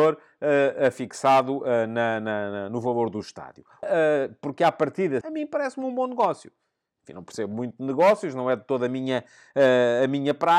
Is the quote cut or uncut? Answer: cut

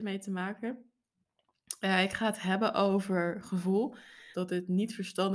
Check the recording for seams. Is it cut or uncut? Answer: cut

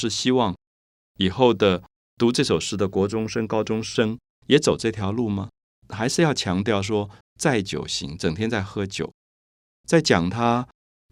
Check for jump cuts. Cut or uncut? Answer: cut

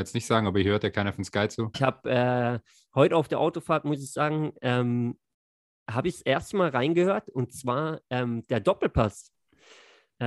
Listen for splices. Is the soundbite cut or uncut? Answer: cut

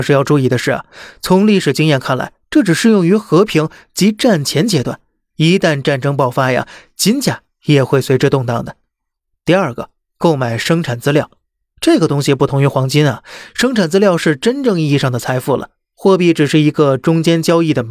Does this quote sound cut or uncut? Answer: uncut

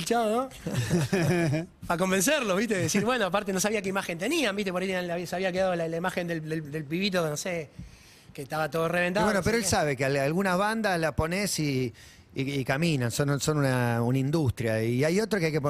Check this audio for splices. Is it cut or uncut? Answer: uncut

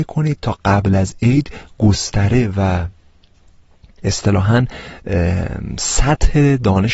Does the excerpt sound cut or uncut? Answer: uncut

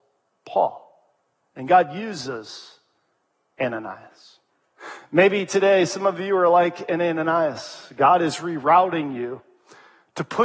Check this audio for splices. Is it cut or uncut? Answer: uncut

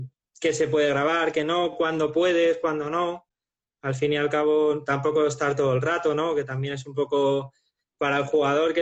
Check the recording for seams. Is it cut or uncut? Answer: uncut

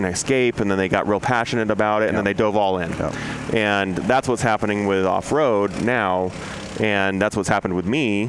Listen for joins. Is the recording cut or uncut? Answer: uncut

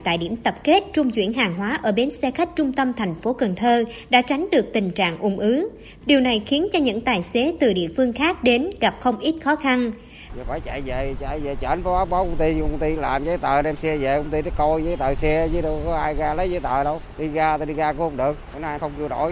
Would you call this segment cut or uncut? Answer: cut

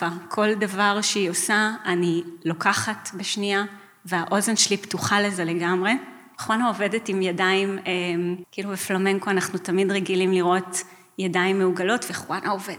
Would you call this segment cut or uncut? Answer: cut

